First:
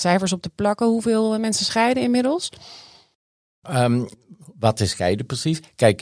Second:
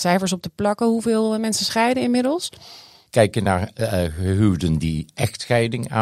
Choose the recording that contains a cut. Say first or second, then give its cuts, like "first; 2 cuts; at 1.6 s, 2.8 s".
second; 1 cut; at 3.1 s